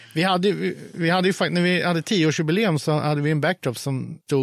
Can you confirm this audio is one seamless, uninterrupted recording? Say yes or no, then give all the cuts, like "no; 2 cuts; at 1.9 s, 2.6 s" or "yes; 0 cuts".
yes; 0 cuts